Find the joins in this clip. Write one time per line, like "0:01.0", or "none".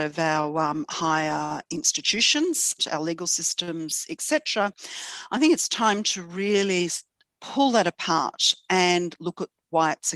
0:02.8